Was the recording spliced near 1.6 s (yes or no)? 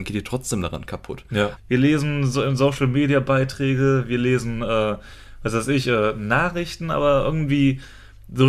yes